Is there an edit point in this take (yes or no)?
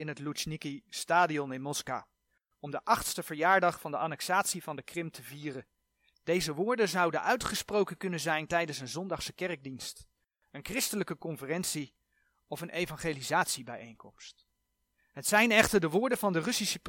yes